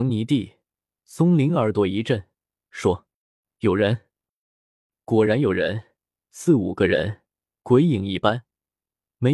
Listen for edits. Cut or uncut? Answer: uncut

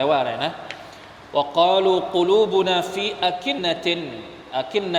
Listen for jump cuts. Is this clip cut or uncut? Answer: cut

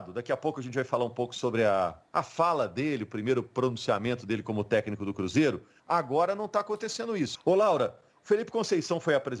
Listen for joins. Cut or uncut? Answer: cut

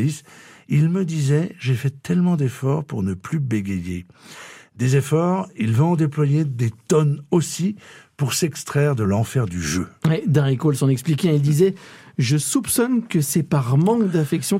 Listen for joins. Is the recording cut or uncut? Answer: uncut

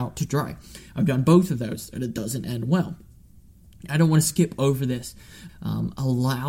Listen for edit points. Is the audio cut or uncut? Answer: cut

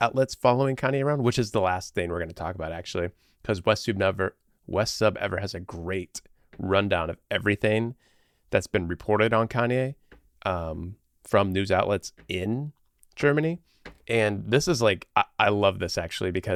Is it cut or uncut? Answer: uncut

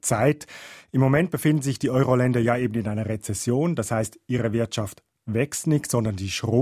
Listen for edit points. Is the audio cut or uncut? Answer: uncut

